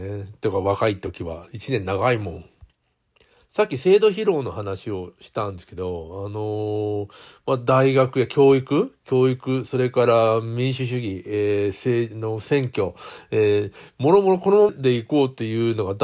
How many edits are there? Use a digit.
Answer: 1